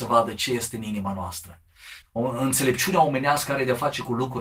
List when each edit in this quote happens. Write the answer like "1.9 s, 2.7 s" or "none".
2.0 s

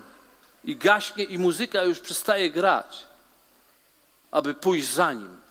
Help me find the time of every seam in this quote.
4.2 s

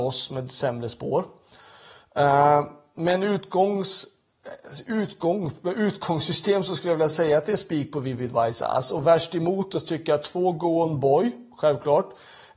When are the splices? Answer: none

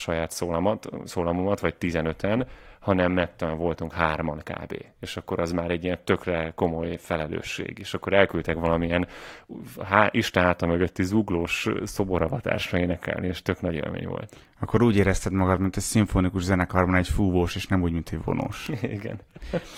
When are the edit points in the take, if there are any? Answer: none

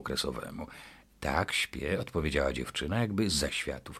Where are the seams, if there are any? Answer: none

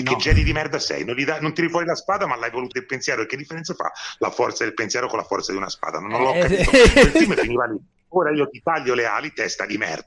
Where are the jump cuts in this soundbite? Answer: 2.7 s

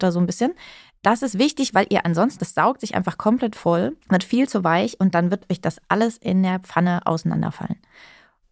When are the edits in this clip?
2.4 s, 4.0 s

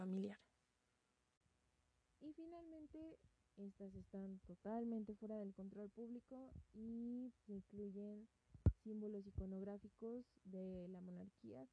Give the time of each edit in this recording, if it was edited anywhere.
3.4 s, 7.5 s

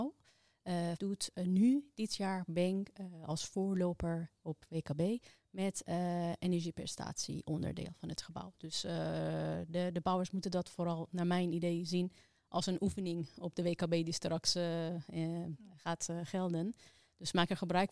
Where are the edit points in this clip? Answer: 1.0 s

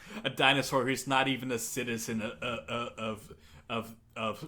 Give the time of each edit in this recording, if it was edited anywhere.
none

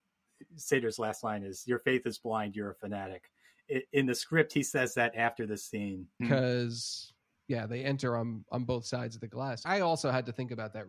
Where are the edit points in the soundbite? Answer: 6.2 s, 9.7 s

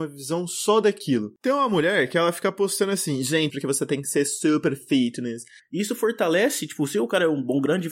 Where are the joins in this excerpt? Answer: 1.4 s, 3.5 s, 5.6 s

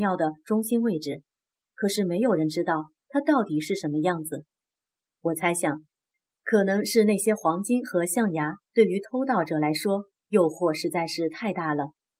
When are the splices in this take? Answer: 1.6 s

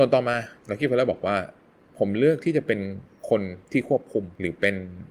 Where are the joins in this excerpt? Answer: none

